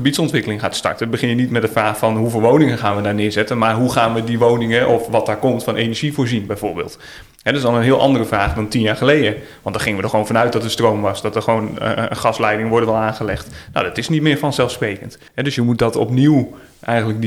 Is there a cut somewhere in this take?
yes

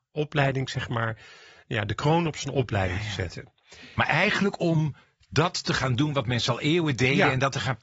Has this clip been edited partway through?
no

